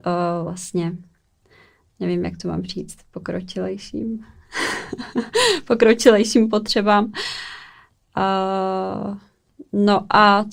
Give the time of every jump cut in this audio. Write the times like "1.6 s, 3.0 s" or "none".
none